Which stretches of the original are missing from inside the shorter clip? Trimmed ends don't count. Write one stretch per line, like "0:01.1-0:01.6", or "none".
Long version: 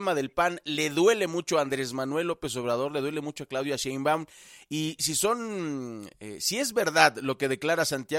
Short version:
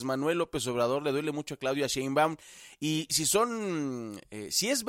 none